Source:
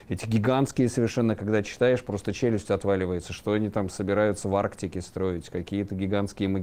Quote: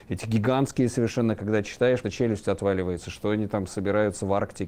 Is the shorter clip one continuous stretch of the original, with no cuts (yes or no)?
no